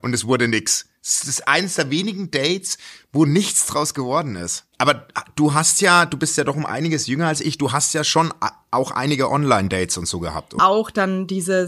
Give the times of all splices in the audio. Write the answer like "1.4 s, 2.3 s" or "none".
4.7 s, 10.6 s